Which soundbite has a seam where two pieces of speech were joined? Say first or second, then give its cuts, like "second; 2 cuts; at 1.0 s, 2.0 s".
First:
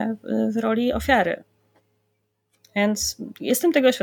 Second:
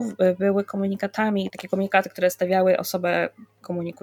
second; 1 cut; at 1.5 s